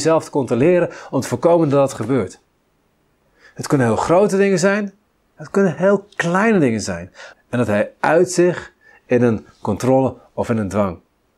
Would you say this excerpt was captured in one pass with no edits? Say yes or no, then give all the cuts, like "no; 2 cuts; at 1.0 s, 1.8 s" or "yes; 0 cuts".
no; 1 cut; at 7.3 s